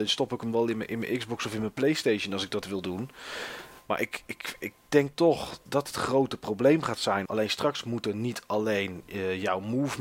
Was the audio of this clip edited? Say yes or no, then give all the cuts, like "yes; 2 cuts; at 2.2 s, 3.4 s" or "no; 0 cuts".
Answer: yes; 2 cuts; at 5.7 s, 7.3 s